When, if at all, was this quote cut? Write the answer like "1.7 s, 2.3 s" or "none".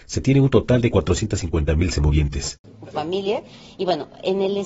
2.9 s